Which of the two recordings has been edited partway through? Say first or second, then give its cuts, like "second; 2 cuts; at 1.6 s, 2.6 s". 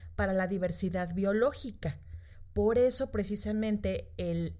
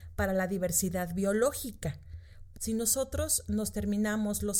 second; 1 cut; at 2.5 s